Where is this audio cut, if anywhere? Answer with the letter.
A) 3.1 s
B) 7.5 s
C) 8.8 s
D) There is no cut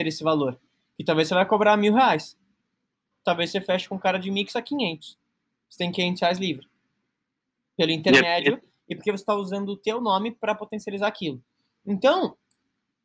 A